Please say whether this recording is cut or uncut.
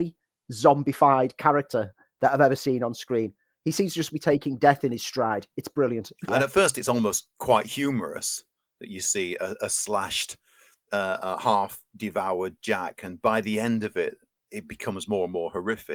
cut